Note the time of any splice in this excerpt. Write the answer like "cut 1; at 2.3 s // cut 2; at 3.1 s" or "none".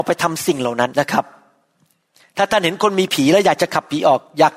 cut 1; at 0.9 s